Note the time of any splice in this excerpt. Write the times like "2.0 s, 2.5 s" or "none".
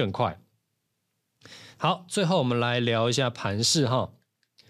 1.7 s